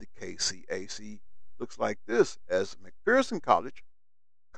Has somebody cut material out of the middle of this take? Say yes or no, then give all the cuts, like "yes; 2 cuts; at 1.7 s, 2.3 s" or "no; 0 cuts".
no; 0 cuts